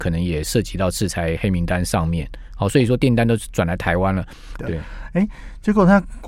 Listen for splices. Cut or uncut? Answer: cut